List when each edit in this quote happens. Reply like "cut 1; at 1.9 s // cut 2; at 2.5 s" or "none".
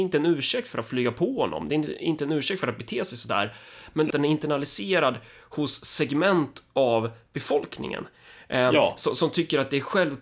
cut 1; at 4.1 s